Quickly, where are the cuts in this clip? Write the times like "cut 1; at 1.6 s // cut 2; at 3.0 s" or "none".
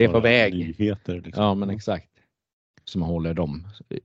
cut 1; at 2.7 s